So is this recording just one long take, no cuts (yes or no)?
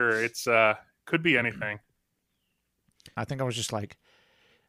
no